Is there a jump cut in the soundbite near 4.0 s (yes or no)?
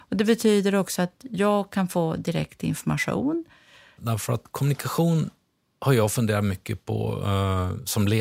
yes